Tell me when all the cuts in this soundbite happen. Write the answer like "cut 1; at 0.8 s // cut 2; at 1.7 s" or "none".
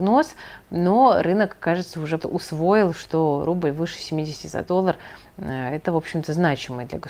cut 1; at 2.2 s